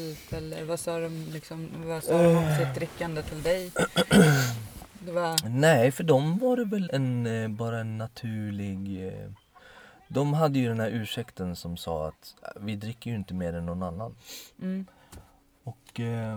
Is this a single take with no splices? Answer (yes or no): no